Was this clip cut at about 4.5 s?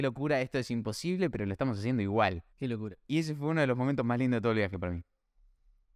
no; 1 cut; at 2.5 s

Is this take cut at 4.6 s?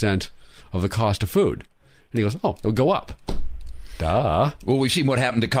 no; 0 cuts

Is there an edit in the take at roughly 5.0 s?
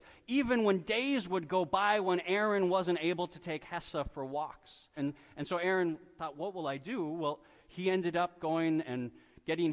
yes; 1 cut; at 5.0 s

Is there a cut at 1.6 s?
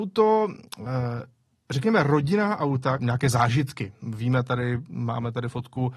no; 1 cut; at 3.0 s

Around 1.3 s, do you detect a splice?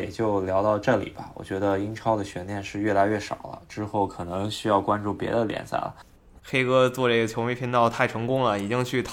no; 1 cut; at 6.4 s

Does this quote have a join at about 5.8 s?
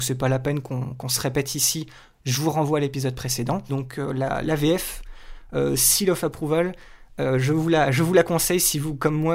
no; 1 cut; at 3.7 s

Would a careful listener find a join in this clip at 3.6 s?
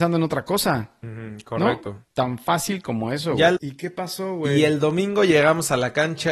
yes; 2 cuts; at 2.1 s, 3.6 s

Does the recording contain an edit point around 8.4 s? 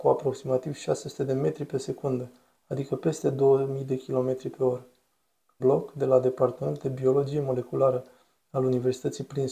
no; 1 cut; at 5.6 s

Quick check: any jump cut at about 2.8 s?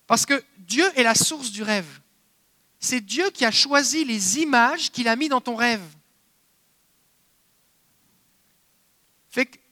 yes; 1 cut; at 2.8 s

